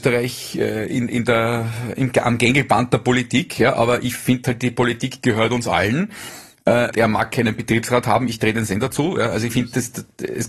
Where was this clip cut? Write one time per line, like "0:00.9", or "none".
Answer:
0:06.9